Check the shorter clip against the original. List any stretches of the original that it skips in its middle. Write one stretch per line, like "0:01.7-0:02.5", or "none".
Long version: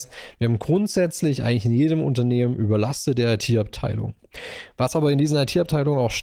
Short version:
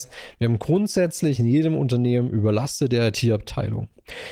0:01.4-0:01.6

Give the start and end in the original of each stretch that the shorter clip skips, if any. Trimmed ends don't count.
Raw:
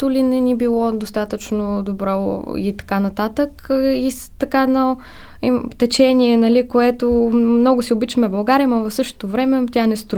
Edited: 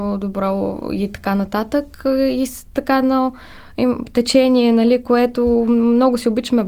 none

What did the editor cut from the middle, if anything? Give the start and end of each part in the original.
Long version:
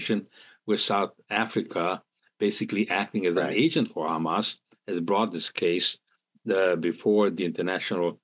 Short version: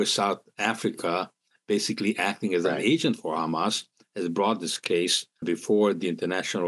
0:06.1-0:06.8

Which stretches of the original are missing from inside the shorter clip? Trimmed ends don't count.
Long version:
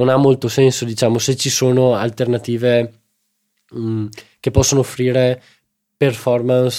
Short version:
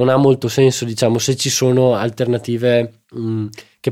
0:03.0-0:03.6

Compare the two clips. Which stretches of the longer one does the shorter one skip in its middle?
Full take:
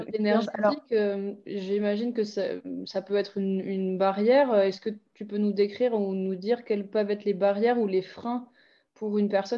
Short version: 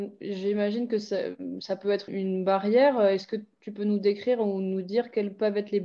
0:03.3-0:03.6

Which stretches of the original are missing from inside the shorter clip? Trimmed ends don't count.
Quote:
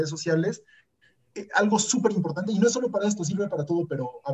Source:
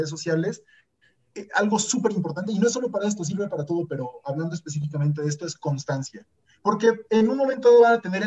none

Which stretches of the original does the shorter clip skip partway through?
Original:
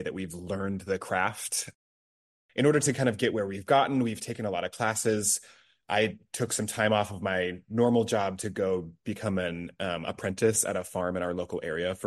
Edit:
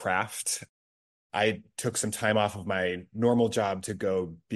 0:02.4-0:05.9

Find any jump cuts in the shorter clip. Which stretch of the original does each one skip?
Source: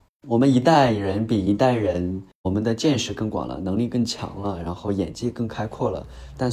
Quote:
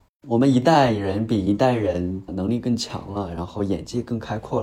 0:02.3-0:03.6

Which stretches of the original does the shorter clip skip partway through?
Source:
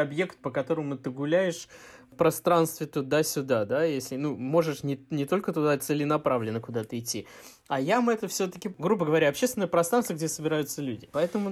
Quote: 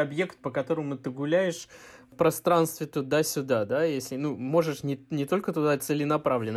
none

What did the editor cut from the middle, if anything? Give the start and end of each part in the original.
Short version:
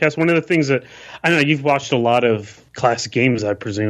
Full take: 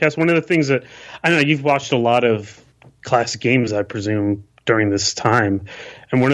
0:02.7-0:03.0

